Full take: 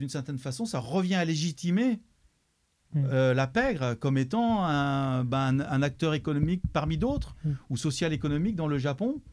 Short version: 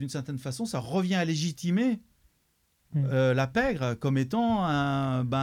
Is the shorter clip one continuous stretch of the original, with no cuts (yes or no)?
yes